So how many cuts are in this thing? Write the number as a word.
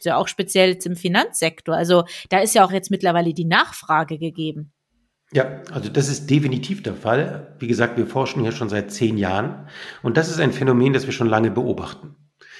one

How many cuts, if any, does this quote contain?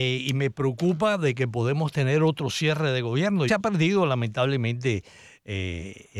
one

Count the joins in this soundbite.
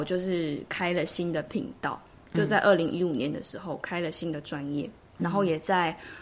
one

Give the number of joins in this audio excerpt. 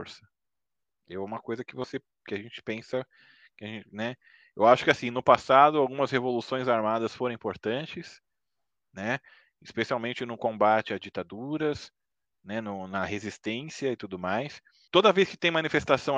one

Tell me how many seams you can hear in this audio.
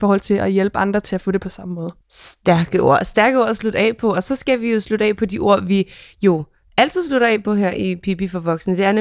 one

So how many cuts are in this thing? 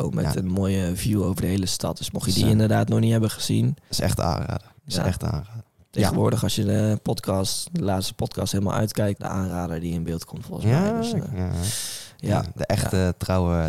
one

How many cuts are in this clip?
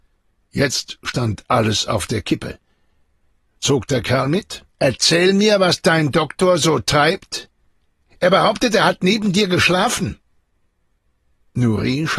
one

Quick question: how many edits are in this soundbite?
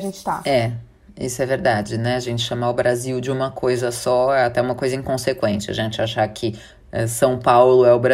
zero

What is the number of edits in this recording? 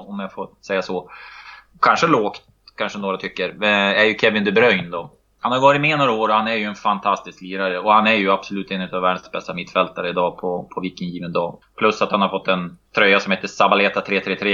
three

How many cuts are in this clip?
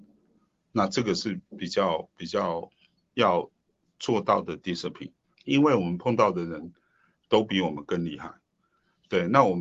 one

